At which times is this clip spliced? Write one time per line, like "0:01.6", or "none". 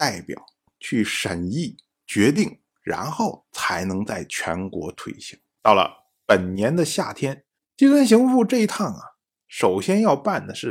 0:05.6
0:07.6